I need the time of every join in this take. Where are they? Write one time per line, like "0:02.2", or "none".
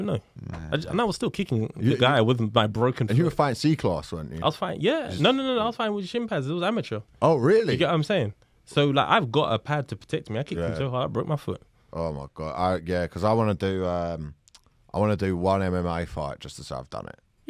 none